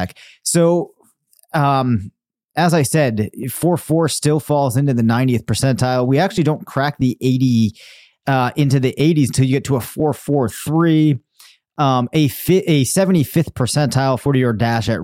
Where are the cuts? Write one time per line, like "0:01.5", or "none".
none

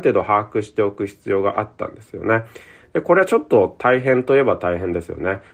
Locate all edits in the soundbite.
none

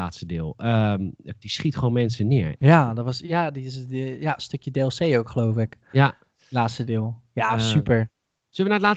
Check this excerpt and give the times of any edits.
0:01.4
0:02.6

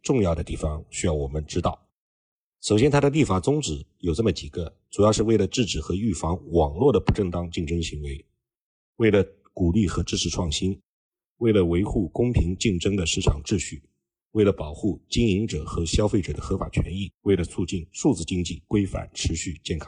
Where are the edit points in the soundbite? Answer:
0:17.2

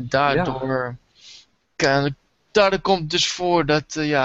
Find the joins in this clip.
none

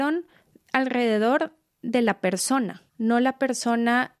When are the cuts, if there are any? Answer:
0:02.9

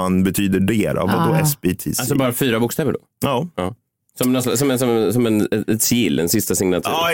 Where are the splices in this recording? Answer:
none

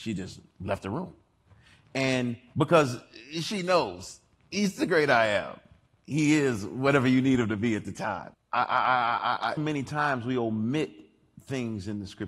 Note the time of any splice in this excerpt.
0:08.3
0:09.6

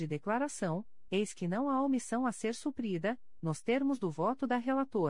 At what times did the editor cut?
none

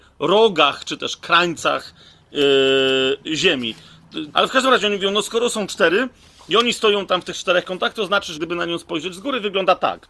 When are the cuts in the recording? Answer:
0:04.3
0:08.3

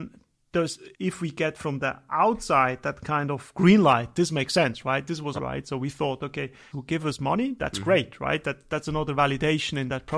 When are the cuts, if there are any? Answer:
0:00.9
0:05.4
0:06.7

